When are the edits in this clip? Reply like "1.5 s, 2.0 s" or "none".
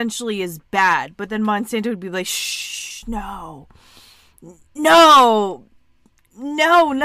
none